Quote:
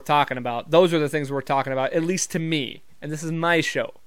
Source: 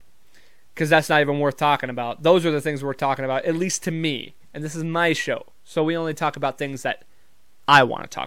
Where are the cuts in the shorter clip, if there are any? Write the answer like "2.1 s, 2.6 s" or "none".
none